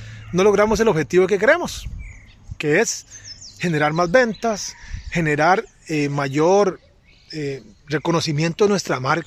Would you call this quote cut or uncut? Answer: uncut